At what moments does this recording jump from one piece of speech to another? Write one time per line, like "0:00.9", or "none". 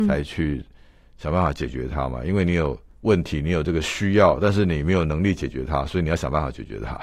none